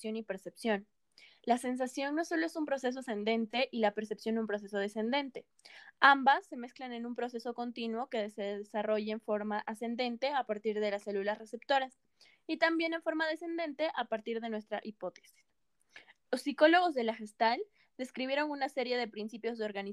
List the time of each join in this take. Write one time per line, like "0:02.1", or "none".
none